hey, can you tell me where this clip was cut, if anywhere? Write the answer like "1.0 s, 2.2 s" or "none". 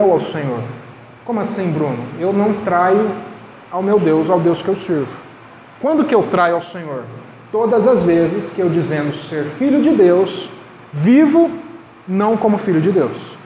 none